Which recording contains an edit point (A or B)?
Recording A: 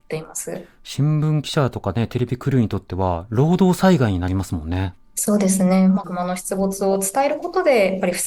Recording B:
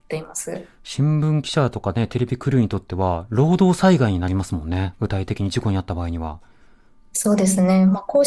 A